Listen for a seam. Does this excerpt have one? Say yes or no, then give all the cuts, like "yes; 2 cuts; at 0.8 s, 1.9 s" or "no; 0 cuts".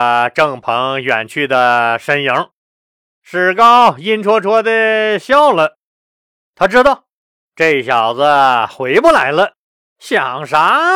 yes; 1 cut; at 9.9 s